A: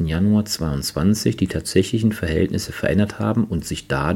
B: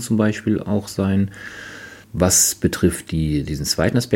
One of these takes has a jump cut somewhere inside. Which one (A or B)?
B